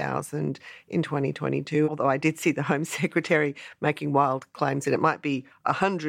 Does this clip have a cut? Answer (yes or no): yes